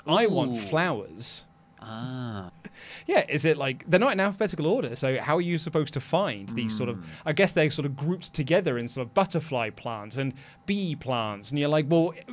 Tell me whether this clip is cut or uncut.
cut